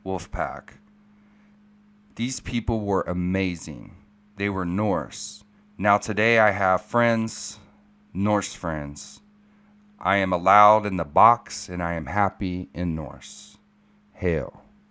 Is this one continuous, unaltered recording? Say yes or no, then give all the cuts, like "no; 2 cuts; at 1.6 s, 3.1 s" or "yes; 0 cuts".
no; 1 cut; at 5.6 s